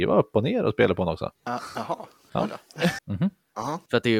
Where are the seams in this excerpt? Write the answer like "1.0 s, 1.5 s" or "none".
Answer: 1.4 s, 3.0 s